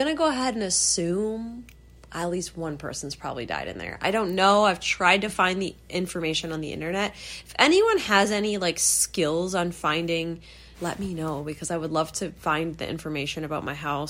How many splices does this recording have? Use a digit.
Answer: 1